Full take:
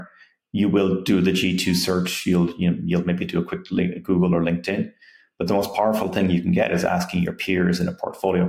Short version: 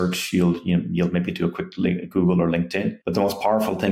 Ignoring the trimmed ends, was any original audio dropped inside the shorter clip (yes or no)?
yes